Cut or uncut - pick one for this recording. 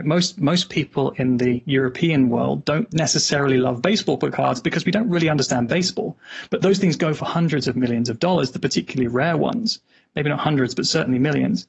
uncut